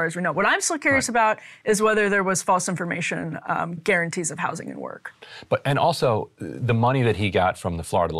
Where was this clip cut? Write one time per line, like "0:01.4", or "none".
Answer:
0:03.8